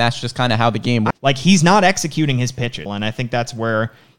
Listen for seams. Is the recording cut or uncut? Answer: cut